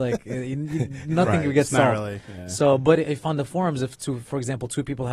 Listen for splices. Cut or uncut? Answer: uncut